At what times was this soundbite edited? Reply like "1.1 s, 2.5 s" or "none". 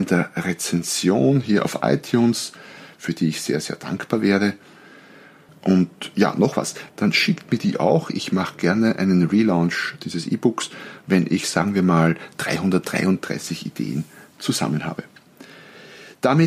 5.5 s, 6.9 s